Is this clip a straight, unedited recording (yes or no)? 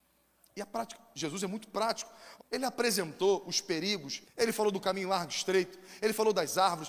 no